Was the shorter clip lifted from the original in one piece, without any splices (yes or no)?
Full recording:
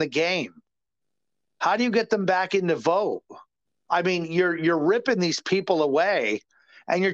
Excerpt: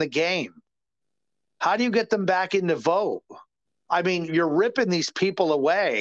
no